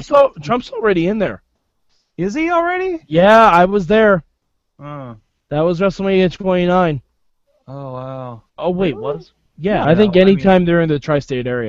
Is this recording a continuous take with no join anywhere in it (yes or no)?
no